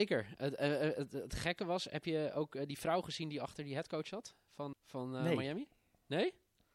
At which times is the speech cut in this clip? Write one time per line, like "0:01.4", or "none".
0:04.7